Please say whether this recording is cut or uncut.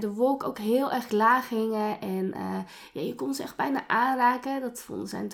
uncut